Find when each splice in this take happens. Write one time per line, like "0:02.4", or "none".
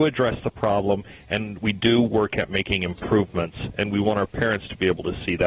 none